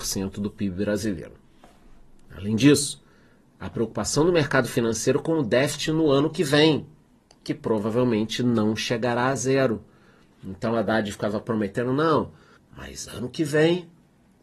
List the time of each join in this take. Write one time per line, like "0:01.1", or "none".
0:12.6